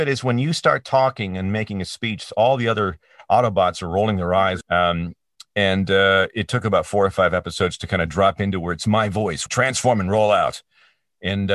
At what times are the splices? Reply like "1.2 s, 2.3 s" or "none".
4.6 s, 9.5 s